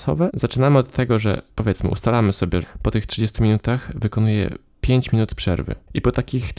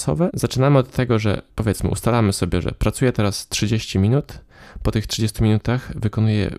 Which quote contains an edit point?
first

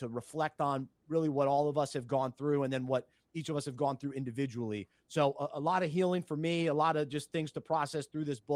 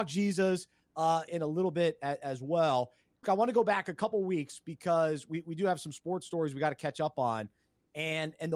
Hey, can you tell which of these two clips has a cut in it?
second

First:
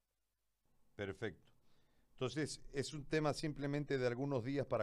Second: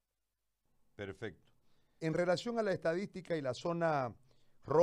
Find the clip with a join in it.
second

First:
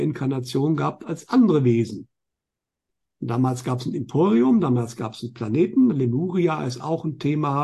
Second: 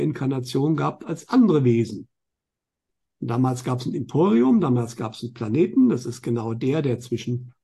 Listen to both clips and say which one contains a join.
first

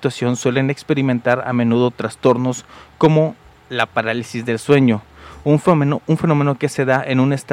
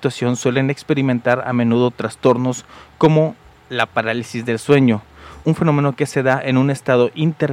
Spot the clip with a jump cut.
second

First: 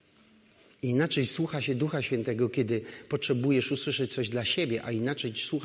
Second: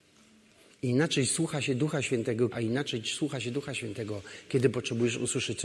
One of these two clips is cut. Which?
second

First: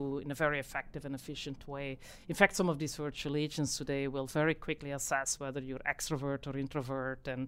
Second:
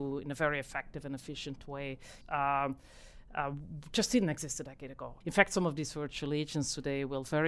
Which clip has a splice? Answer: second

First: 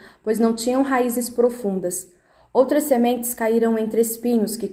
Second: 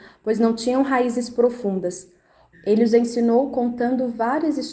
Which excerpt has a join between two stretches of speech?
second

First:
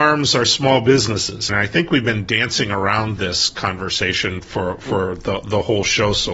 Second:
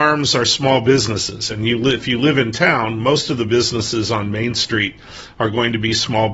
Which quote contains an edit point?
first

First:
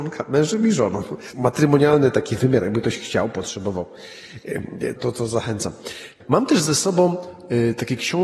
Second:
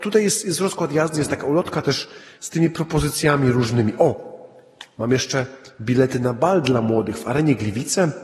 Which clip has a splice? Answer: first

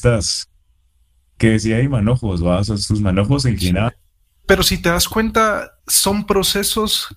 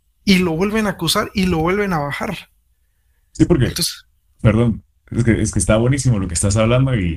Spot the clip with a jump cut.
first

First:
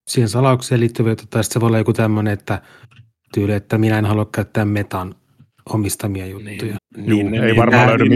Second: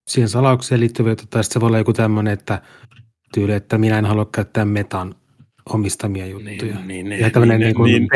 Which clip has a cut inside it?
first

